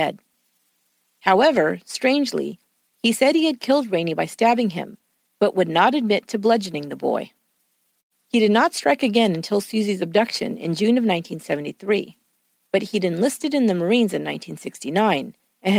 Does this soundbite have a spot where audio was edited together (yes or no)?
no